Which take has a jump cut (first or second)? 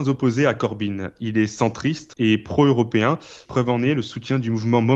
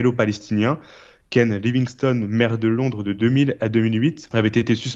first